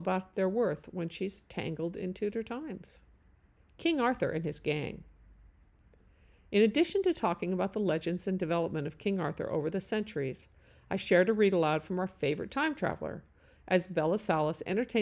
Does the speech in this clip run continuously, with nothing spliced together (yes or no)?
no